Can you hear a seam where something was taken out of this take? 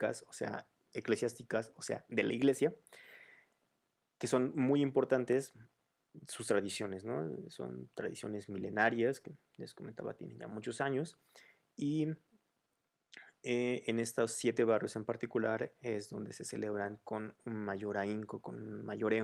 no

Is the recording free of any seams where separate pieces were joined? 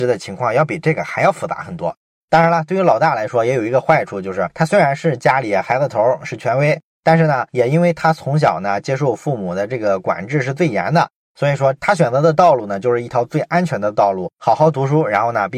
no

